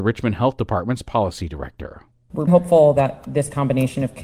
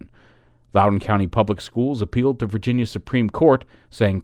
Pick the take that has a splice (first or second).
first